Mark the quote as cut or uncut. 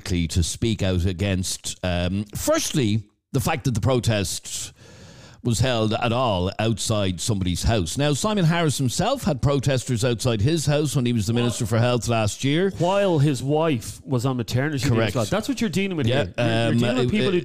uncut